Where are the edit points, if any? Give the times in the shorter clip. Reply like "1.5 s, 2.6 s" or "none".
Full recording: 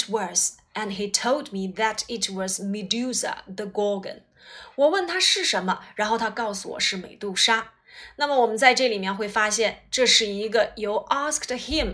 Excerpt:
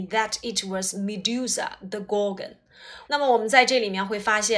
3.0 s